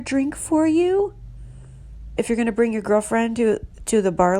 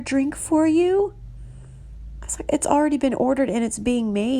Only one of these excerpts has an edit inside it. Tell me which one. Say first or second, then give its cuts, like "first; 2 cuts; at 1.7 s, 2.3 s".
first; 1 cut; at 2.2 s